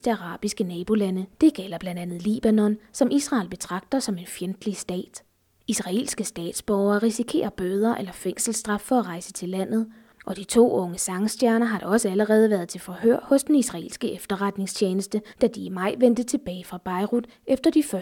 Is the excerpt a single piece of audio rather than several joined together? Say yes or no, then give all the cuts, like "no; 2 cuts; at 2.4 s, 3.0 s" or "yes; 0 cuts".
no; 1 cut; at 1.3 s